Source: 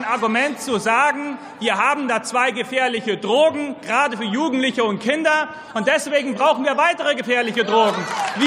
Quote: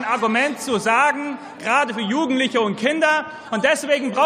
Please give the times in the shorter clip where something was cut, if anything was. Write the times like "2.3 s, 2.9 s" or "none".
1.6 s